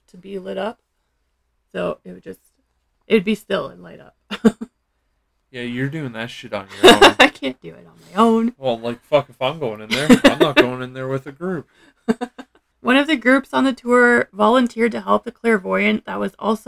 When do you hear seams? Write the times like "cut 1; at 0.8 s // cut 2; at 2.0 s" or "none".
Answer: none